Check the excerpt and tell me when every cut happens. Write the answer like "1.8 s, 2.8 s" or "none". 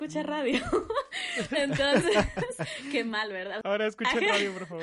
3.6 s